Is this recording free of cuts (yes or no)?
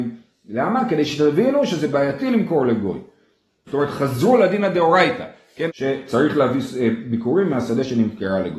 no